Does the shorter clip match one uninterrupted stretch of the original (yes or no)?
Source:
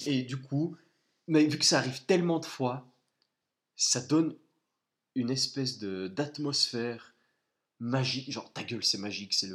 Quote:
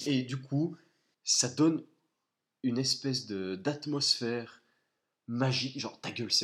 no